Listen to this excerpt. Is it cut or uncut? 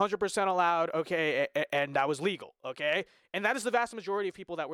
uncut